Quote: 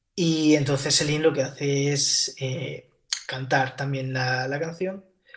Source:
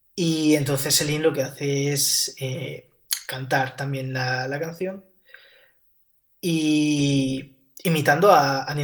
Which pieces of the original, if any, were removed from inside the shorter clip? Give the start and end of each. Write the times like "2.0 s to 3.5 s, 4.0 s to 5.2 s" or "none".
none